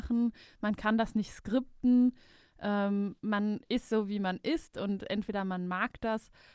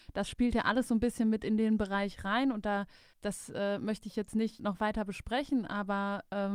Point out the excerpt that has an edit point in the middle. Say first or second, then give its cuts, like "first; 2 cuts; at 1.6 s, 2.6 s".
second; 2 cuts; at 3.1 s, 4.6 s